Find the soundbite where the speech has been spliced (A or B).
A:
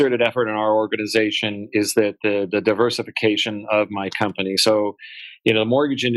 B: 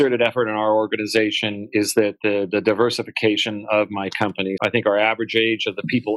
B